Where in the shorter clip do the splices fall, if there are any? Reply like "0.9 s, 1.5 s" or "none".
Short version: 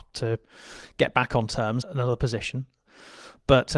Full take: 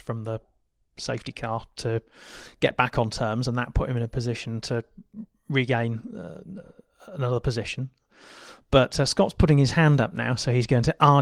1.8 s